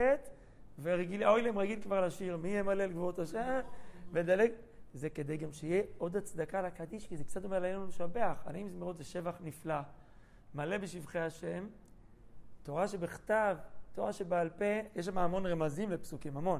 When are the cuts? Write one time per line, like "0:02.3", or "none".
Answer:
none